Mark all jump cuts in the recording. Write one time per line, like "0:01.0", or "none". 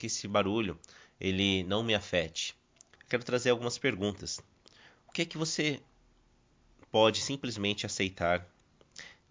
0:03.0